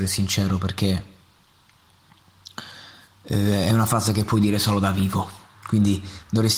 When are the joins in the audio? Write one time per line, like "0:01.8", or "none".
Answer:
none